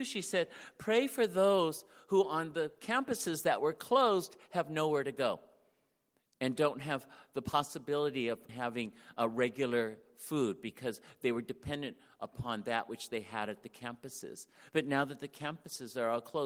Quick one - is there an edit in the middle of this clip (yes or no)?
yes